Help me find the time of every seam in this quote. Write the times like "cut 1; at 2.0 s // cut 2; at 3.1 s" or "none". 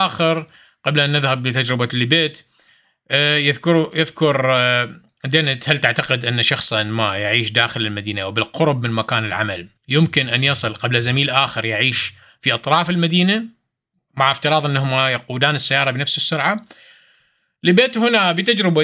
cut 1; at 9.8 s